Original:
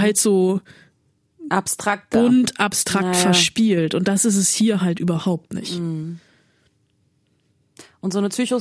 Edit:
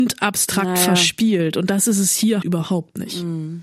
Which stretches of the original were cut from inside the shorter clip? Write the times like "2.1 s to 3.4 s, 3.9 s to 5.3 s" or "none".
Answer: 4.8 s to 5.0 s